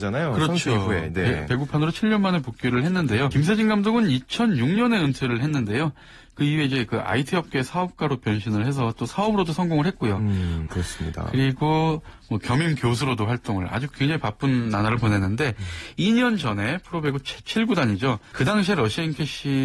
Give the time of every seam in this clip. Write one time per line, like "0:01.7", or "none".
0:03.3
0:10.7
0:18.3